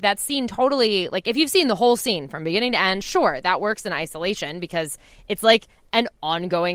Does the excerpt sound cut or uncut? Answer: uncut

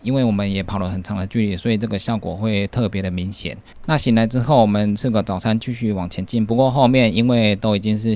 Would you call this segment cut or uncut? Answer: uncut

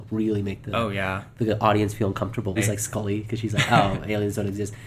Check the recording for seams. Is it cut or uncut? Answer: cut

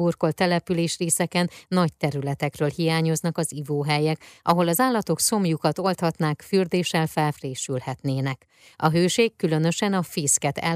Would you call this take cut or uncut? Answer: uncut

